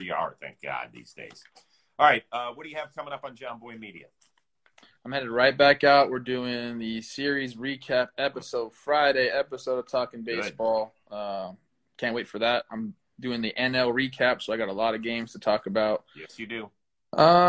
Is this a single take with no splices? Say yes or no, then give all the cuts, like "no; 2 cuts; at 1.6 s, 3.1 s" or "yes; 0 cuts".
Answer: yes; 0 cuts